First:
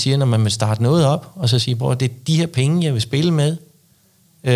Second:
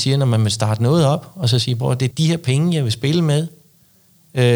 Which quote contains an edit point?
second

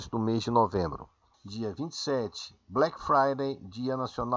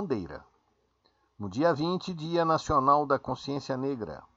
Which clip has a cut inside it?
first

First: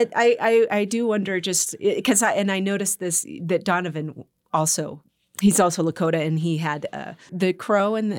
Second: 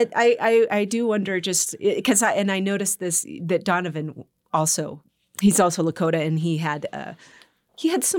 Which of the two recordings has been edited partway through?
first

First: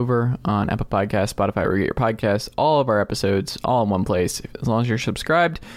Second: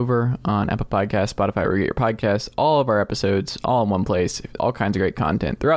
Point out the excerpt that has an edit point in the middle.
second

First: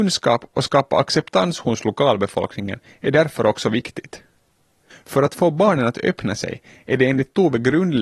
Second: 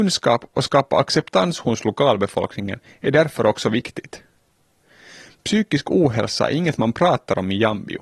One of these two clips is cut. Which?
first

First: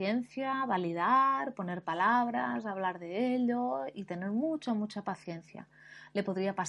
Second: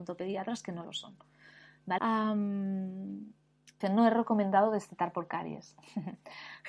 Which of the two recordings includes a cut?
second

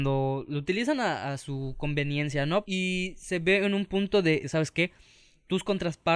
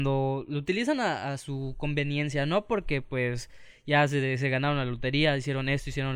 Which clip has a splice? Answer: first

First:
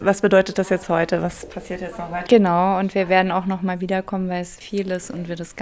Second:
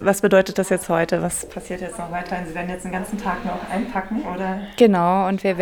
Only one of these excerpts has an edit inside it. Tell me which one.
first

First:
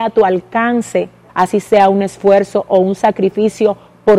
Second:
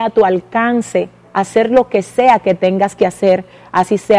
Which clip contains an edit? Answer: first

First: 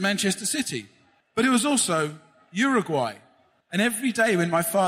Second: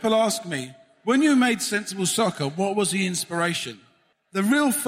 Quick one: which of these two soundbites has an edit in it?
first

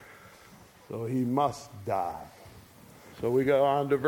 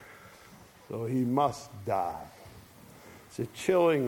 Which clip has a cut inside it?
first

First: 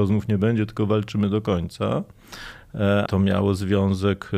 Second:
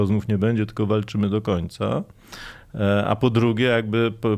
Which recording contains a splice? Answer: first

